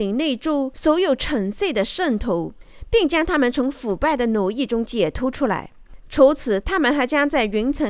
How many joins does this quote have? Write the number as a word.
one